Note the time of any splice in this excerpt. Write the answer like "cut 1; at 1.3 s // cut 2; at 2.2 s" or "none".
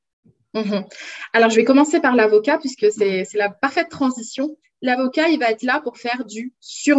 none